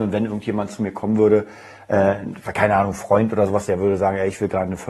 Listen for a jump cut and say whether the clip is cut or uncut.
uncut